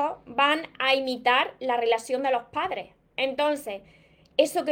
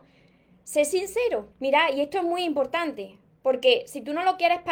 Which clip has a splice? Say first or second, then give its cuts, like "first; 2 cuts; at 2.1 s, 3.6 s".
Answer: second; 1 cut; at 1.5 s